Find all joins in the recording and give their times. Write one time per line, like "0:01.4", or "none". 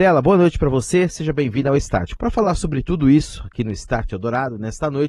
0:02.2